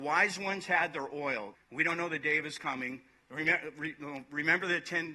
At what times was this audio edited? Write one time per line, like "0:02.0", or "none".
0:01.5